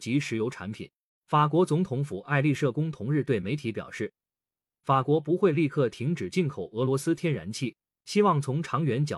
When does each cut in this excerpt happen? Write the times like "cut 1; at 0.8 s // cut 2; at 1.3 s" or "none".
none